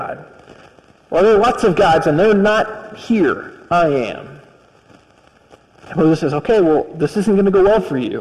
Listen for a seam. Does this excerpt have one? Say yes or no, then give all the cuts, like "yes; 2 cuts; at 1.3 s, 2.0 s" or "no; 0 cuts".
no; 0 cuts